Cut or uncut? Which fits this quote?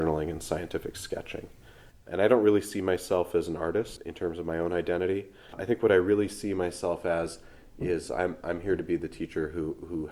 cut